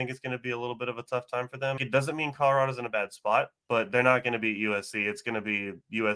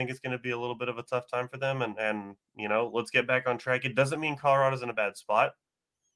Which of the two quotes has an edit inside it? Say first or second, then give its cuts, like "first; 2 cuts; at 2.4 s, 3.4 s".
first; 2 cuts; at 1.8 s, 3.6 s